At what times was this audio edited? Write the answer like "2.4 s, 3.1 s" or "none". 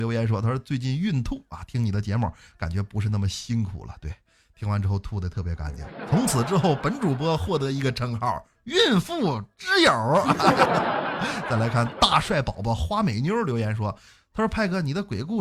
10.7 s